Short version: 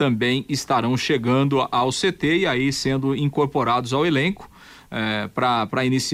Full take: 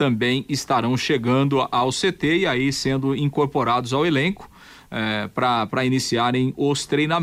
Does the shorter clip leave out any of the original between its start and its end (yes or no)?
no